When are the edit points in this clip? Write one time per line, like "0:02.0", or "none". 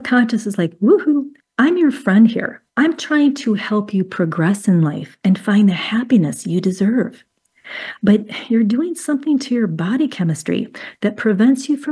0:02.7
0:08.0